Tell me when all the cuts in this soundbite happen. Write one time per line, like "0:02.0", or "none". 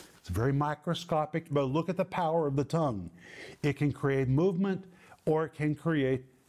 0:01.5